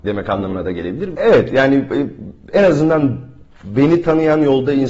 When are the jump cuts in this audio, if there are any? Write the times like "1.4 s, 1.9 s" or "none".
1.1 s